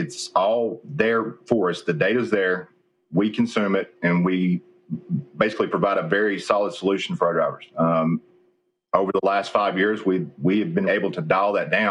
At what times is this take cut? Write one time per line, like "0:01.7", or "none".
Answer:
0:07.7
0:10.9